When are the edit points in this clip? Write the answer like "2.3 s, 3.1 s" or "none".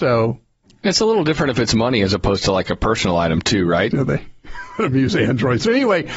3.9 s